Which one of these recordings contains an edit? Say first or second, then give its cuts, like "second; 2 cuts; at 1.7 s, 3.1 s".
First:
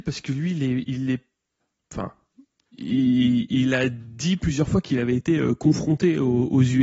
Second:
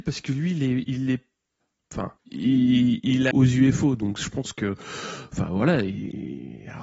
second; 2 cuts; at 2.2 s, 3.3 s